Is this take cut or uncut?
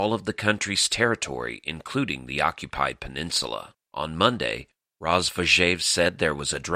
cut